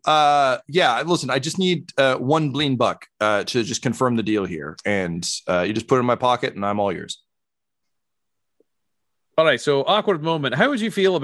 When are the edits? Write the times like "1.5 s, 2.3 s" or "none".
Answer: none